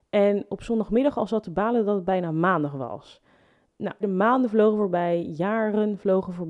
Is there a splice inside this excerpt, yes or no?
yes